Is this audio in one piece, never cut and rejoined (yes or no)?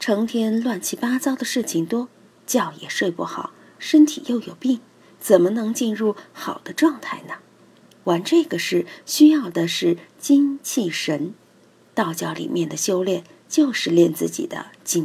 yes